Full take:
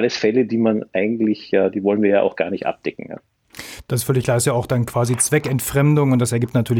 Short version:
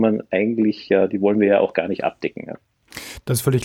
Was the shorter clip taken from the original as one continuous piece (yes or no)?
yes